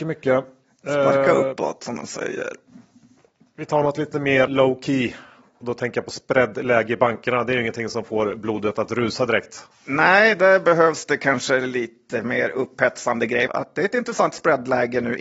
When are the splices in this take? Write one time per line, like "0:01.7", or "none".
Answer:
0:04.5
0:13.5